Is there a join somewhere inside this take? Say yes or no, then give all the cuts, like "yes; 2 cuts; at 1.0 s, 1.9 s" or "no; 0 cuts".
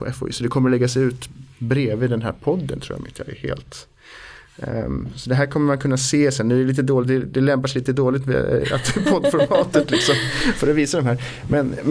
no; 0 cuts